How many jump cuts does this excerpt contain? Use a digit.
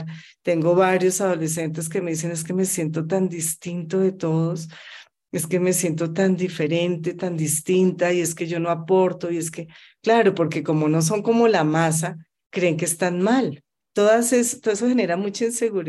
1